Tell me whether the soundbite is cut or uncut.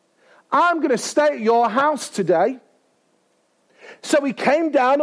uncut